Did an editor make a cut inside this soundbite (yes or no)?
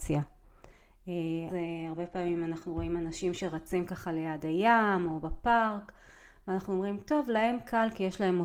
yes